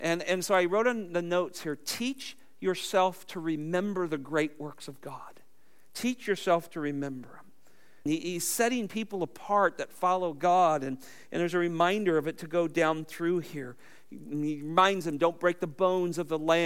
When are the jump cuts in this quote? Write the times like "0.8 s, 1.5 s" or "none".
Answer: 8.1 s